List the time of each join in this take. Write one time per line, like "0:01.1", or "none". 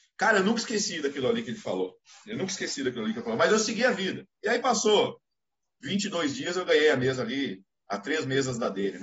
none

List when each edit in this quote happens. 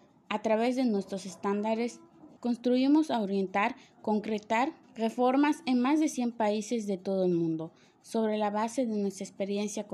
0:02.4
0:04.8

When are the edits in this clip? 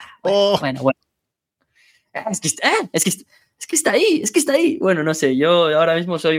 none

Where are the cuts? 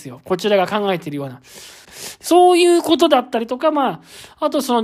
0:01.8

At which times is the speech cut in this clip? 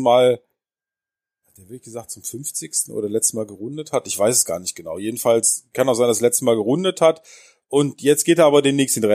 none

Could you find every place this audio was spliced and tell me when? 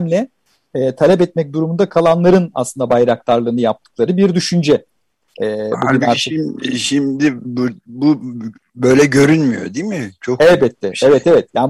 none

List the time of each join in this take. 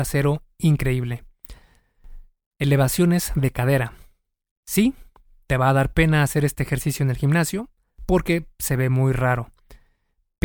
none

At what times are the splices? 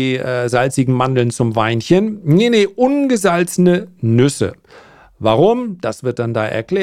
none

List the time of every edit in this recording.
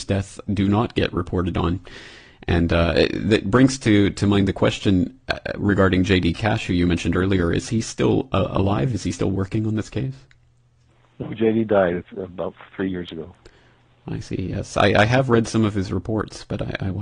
none

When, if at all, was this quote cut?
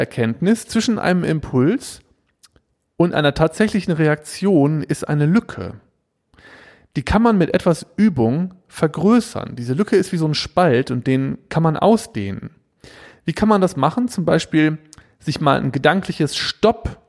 none

